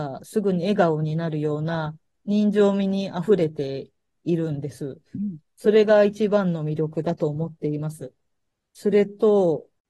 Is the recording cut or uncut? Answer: uncut